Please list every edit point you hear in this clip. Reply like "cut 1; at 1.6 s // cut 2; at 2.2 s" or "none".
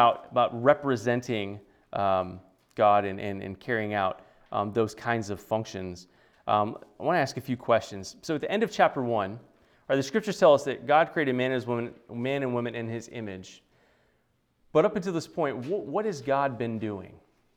none